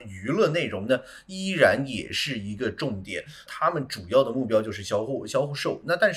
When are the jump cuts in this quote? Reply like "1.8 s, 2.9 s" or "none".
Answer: 3.5 s